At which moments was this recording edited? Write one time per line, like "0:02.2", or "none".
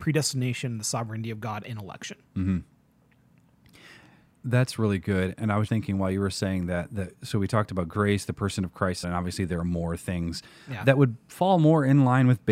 0:05.7
0:09.0